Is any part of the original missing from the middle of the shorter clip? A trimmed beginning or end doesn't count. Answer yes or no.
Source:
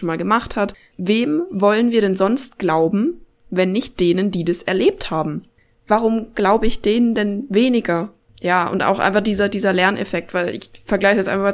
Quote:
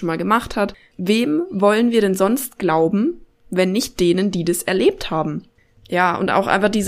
yes